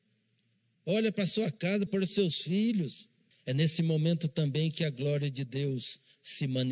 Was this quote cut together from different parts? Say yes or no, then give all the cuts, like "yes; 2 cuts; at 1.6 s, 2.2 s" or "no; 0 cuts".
yes; 2 cuts; at 1.9 s, 3.3 s